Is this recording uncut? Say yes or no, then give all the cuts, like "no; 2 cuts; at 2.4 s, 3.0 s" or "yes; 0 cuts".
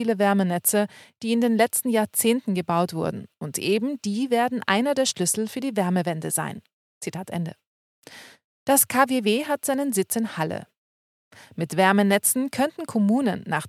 yes; 0 cuts